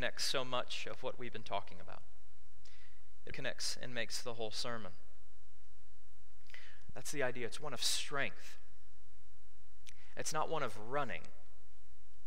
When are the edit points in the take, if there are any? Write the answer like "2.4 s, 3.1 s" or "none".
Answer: 3.3 s, 6.9 s